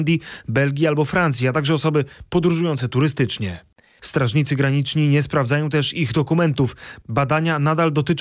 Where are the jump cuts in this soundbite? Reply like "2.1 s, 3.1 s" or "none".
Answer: 4.0 s